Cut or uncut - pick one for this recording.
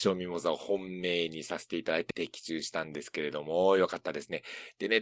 cut